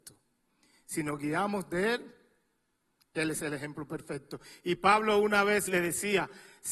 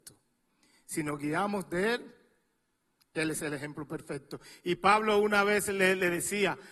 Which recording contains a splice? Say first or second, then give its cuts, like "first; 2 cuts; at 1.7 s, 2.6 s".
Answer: first; 1 cut; at 5.7 s